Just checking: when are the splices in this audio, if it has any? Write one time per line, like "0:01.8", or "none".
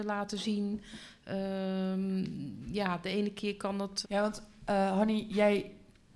0:04.0